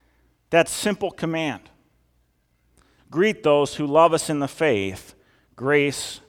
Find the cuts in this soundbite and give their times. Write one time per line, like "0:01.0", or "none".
0:03.0